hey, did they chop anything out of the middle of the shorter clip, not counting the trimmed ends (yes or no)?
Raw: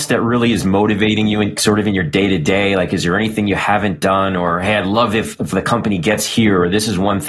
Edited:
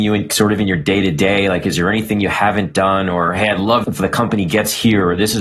yes